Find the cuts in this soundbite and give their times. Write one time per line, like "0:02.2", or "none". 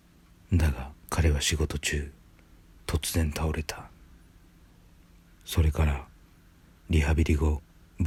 0:01.1
0:05.2